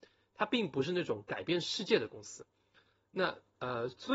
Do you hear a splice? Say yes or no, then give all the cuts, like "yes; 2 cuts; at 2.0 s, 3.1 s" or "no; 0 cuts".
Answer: no; 0 cuts